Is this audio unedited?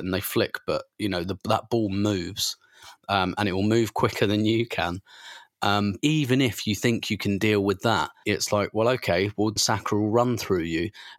no; 3 cuts; at 6.0 s, 8.2 s, 9.6 s

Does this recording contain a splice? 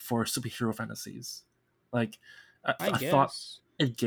yes; 1 cut; at 2.8 s

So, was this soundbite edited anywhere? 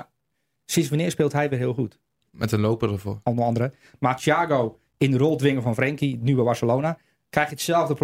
yes; 1 cut; at 3.2 s

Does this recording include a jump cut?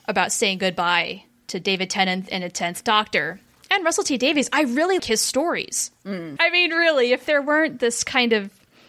yes; 2 cuts; at 5.0 s, 6.4 s

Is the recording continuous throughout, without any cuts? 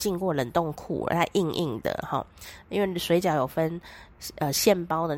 yes; 0 cuts

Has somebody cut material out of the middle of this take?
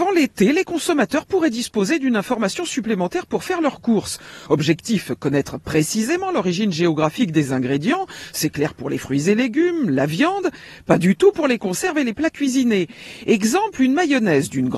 no; 0 cuts

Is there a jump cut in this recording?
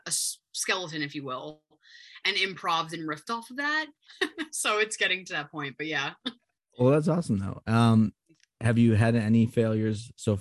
yes; 1 cut; at 4.1 s

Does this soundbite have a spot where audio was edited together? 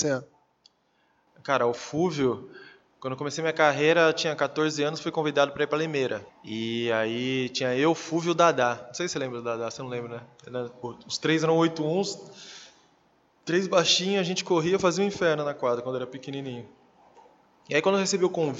yes; 1 cut; at 6.3 s

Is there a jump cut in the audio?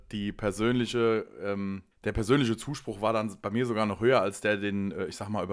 yes; 1 cut; at 1.9 s

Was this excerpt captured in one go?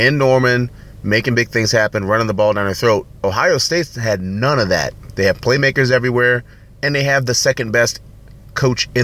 no; 1 cut; at 5.1 s

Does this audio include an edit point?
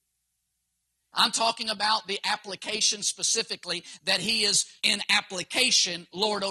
yes; 2 cuts; at 1.1 s, 4.8 s

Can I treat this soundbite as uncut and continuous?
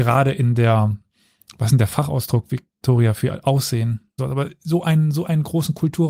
no; 1 cut; at 4.2 s

